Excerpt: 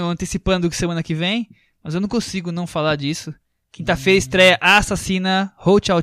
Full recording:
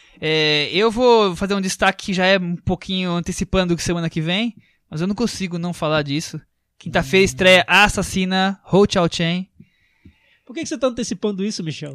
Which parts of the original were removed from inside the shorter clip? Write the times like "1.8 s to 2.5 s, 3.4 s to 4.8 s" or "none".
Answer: none